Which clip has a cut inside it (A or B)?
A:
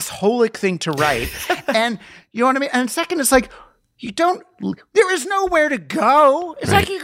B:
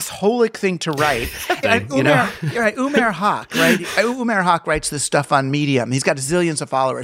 B